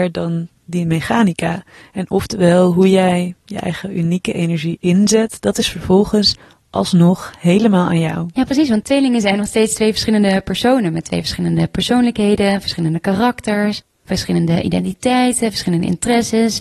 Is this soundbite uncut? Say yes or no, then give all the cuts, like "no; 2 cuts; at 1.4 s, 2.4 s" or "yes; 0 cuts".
yes; 0 cuts